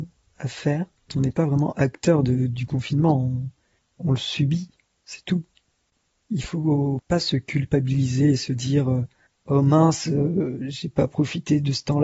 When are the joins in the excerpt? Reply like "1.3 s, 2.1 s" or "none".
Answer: 1.1 s